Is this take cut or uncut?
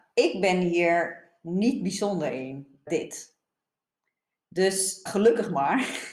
cut